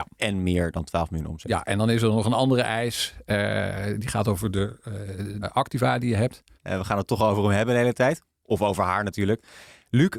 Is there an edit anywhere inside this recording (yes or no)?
yes